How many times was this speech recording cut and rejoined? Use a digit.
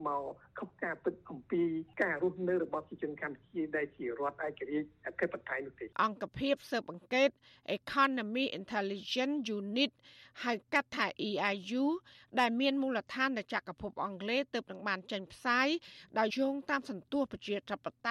2